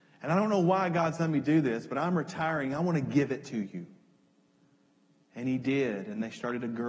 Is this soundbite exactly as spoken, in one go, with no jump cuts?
yes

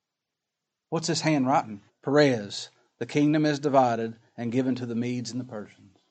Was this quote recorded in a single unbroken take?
no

